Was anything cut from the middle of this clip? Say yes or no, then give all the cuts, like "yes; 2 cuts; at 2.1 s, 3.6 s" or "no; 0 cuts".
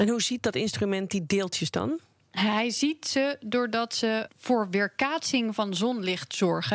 yes; 1 cut; at 4.3 s